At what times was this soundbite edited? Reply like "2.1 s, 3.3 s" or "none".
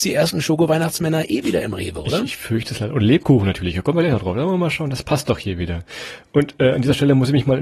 none

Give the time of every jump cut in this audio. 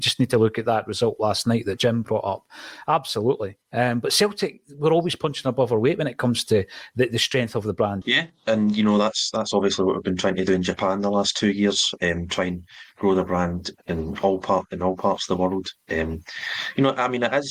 8.0 s

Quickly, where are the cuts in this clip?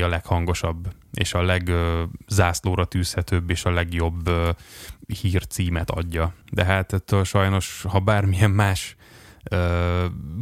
6.4 s

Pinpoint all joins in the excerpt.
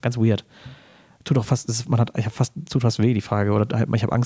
none

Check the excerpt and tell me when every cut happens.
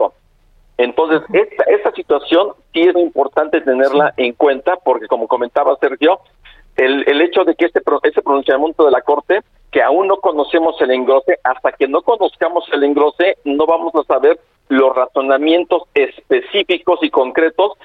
2.9 s

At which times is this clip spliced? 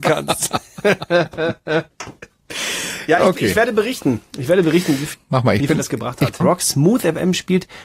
5.1 s, 6.4 s

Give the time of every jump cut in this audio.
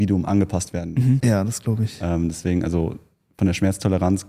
1.2 s

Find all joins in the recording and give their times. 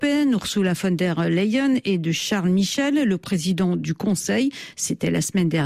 none

